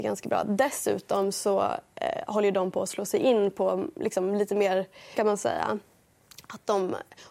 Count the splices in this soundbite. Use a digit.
1